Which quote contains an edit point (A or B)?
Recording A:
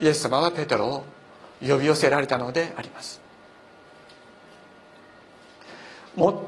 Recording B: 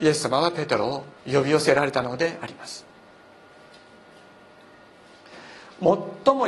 B